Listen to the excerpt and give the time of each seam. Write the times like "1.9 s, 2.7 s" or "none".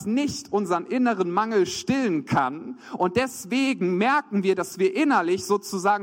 none